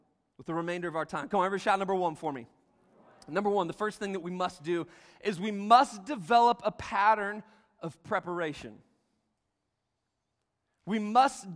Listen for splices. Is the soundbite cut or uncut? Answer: uncut